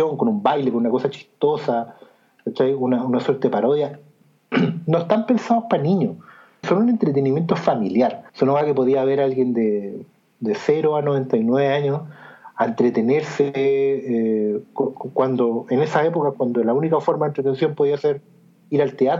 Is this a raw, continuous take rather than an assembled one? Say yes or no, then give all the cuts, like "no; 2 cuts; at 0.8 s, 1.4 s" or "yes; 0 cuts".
no; 3 cuts; at 4.5 s, 6.6 s, 8.3 s